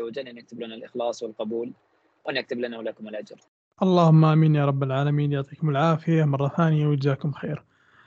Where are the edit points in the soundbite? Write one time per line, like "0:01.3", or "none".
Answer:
none

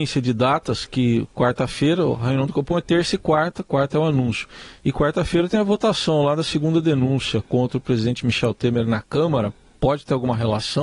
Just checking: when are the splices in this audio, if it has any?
none

